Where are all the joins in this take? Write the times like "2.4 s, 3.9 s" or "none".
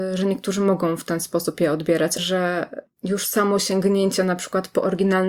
2.2 s